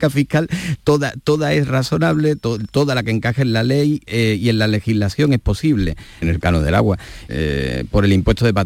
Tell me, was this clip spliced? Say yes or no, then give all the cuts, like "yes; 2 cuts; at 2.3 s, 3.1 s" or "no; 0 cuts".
yes; 2 cuts; at 6.2 s, 7.3 s